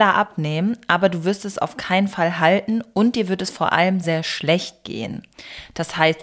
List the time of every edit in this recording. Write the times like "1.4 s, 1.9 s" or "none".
4.0 s